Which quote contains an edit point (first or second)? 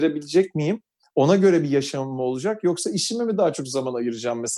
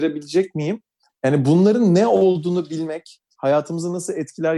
second